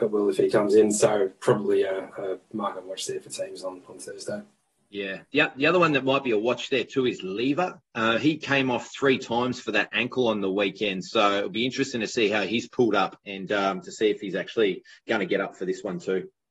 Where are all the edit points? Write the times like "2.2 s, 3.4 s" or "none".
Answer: none